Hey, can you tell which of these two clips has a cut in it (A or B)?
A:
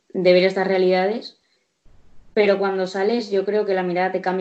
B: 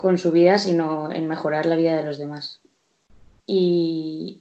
B